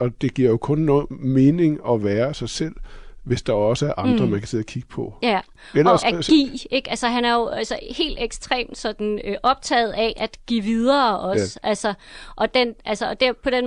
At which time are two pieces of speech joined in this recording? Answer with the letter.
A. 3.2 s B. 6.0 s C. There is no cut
B